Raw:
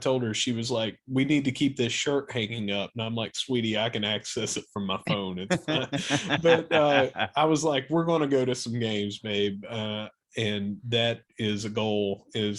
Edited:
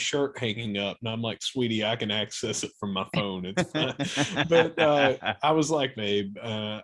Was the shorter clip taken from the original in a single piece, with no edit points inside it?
no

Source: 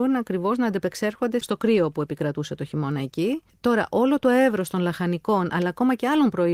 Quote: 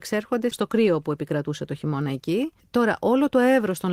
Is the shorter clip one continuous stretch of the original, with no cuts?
yes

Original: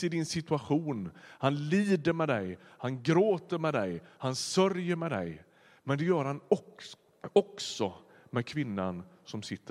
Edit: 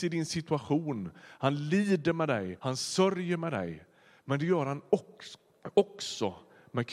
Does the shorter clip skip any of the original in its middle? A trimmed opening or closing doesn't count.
yes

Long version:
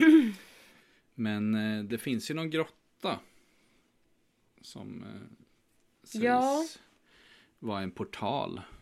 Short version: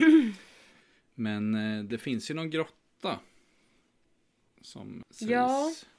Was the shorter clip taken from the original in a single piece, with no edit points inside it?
no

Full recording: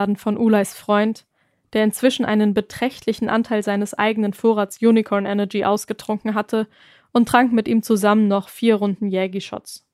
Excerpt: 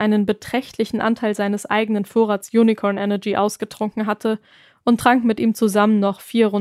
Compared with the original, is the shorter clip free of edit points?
yes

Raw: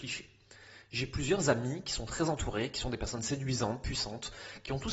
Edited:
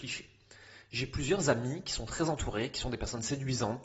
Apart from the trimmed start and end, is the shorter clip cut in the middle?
no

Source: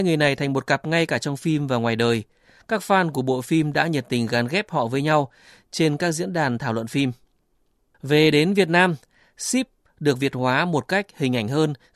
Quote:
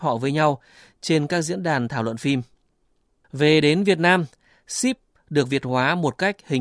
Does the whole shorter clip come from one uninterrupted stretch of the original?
yes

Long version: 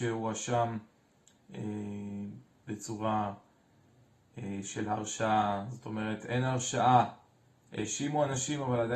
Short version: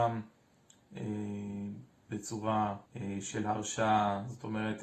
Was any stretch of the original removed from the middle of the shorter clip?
yes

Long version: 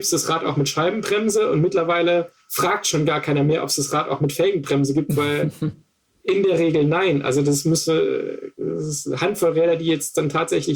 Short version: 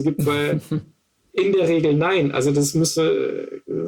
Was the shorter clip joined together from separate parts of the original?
no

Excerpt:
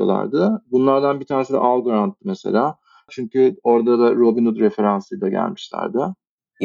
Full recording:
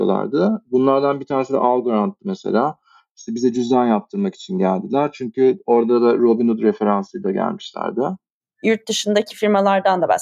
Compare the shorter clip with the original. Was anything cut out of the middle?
yes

